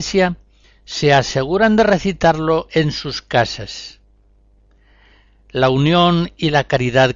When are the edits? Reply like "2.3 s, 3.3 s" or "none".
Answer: none